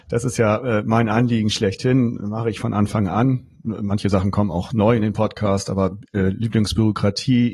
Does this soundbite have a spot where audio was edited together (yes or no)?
no